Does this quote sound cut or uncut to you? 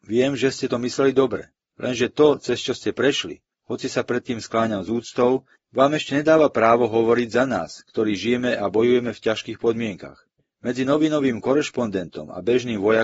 uncut